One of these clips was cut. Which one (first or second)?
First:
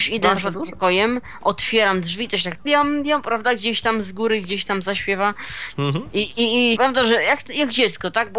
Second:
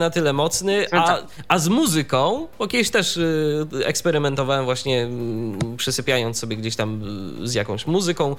first